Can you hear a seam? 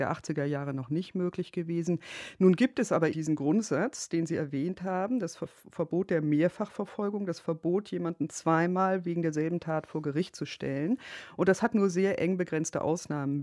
yes; 1 cut; at 3.1 s

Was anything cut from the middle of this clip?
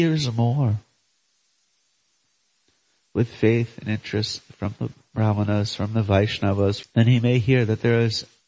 yes; 1 cut; at 6.8 s

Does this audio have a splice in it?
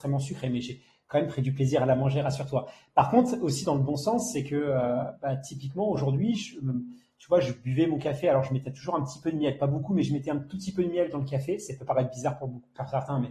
no; 0 cuts

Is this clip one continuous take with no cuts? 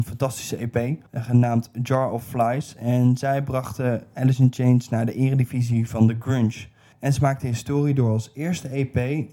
no; 1 cut; at 1.1 s

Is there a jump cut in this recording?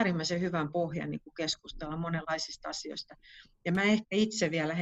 no; 0 cuts

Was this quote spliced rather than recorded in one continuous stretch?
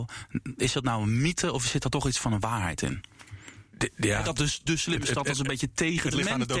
no; 0 cuts

